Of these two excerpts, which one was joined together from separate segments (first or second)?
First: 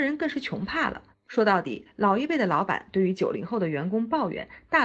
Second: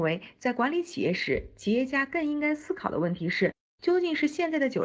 first